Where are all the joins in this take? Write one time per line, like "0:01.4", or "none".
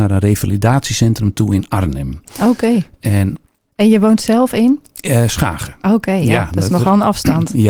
none